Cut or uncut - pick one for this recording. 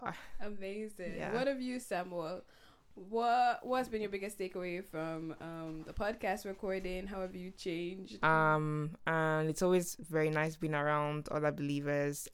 cut